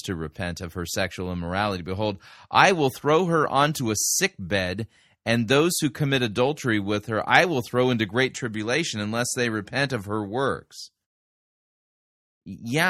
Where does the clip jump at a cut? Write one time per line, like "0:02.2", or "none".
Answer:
none